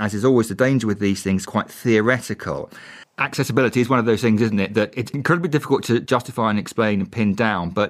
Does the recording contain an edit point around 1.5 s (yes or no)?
no